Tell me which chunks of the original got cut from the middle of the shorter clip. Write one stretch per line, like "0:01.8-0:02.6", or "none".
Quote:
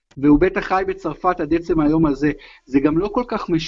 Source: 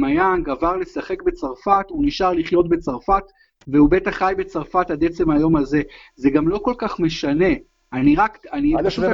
none